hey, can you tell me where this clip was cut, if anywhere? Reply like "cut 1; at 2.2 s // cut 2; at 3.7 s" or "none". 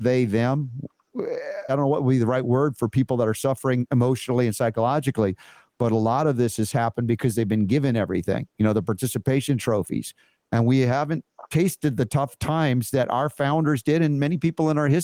cut 1; at 1.7 s